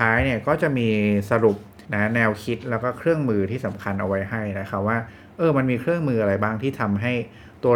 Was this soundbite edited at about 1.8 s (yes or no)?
yes